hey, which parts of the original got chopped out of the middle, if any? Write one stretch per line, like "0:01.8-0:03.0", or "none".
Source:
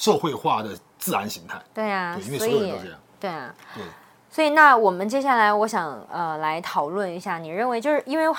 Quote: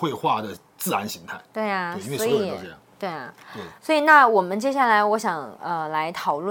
0:04.0-0:04.3